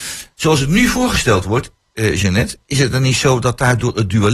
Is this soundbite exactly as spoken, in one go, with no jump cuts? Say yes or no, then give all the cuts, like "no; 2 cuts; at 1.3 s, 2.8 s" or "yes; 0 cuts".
yes; 0 cuts